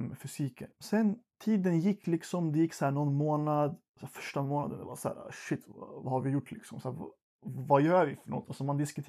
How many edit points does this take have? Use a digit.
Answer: 0